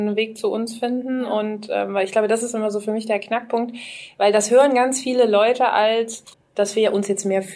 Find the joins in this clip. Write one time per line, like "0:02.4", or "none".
0:06.3